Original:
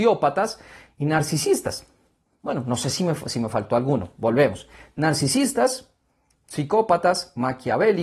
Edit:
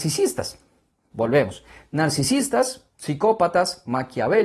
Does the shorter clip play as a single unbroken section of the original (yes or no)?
no